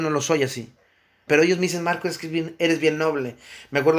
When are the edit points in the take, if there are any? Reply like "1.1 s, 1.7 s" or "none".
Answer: 1.3 s